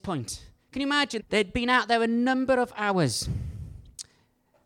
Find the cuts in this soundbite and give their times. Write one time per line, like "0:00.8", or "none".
0:01.2